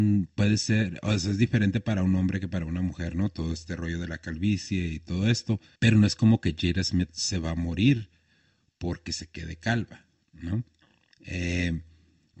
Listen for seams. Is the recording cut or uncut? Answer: cut